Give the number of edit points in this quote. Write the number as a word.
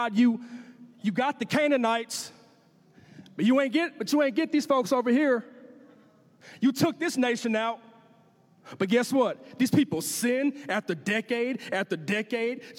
zero